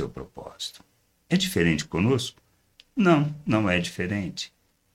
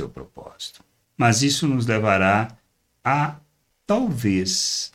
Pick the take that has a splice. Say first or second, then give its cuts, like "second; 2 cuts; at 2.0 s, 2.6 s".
second; 1 cut; at 1.0 s